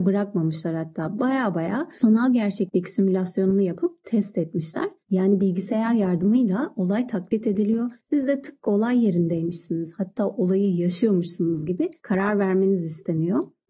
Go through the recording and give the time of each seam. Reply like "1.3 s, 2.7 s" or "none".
none